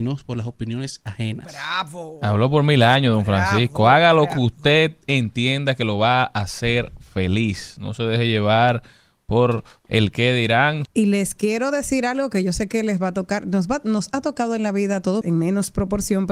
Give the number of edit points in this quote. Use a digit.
2